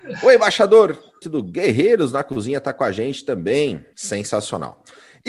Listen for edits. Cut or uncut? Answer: cut